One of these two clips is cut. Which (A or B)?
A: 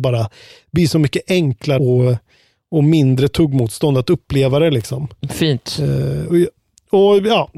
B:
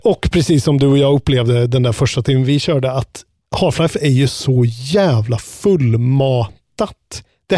A